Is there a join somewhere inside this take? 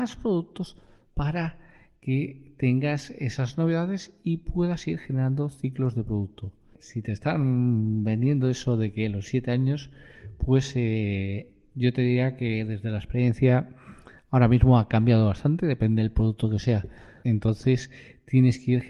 yes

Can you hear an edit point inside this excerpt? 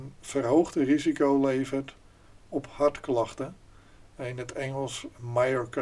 no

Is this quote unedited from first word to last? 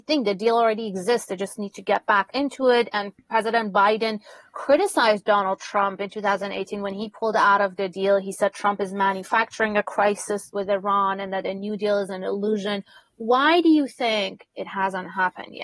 yes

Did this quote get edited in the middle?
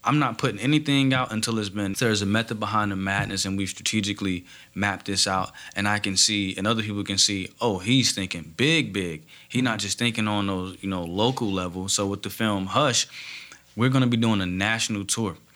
yes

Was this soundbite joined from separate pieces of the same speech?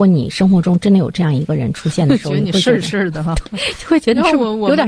yes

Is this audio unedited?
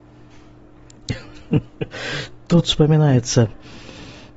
yes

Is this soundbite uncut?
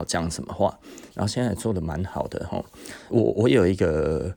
no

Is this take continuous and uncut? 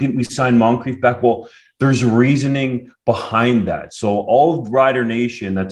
yes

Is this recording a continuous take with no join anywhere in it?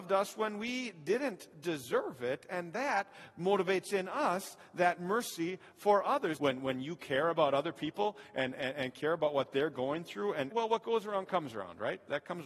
no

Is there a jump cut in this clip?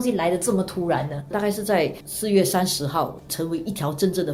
yes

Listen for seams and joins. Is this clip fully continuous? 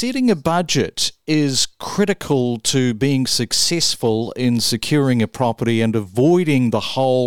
yes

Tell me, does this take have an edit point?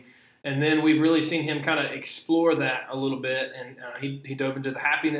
no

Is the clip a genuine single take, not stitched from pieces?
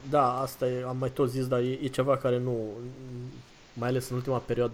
yes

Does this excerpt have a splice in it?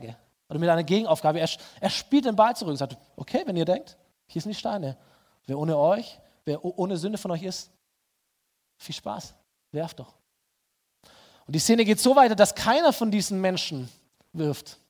no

